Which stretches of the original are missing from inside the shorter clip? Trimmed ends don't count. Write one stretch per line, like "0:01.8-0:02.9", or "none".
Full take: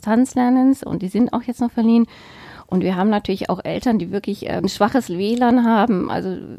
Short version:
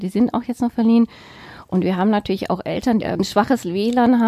0:04.0-0:04.4

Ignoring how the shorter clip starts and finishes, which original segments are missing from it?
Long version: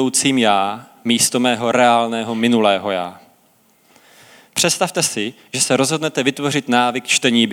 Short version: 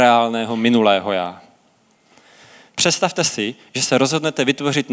none

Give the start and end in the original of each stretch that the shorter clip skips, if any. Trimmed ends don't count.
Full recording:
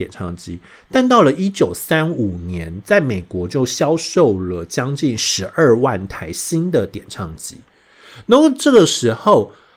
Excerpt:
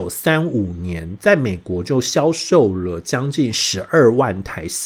none

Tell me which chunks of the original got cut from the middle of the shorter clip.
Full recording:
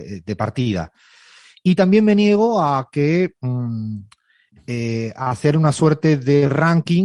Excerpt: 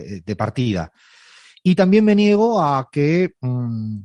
none

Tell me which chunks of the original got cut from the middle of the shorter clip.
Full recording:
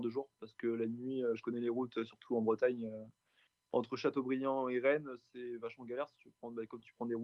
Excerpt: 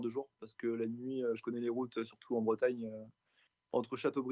none

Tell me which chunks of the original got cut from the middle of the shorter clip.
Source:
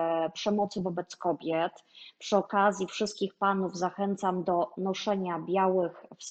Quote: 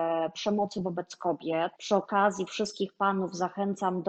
0:01.7-0:02.2

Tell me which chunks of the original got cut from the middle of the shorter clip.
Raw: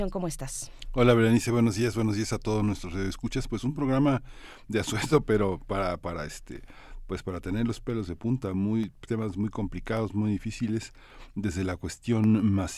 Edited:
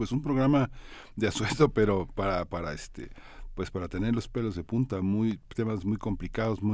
none

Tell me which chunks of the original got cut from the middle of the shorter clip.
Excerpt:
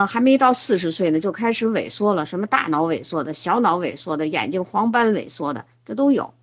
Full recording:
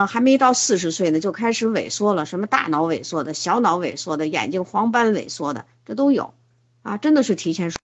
none

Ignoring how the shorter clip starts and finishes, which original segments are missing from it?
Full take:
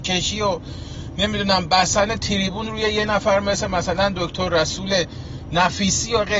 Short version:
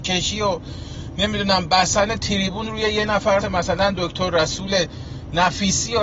0:03.4-0:03.6

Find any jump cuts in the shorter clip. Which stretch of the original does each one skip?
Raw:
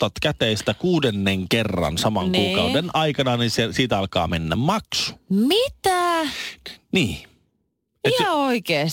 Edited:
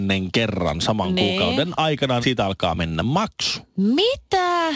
0:03.4-0:03.7

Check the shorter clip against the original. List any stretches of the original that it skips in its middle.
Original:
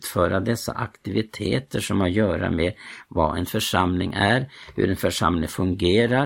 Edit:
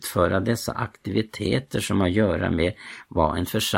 none

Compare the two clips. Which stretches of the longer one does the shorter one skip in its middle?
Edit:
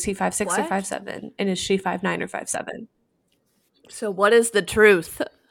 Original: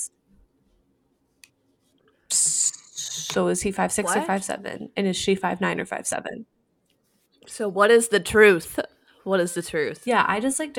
none

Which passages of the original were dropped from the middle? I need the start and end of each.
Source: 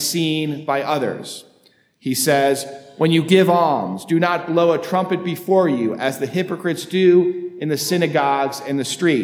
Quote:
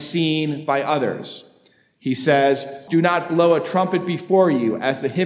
0:02.9-0:04.1

